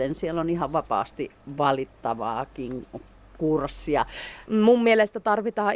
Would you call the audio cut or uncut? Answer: cut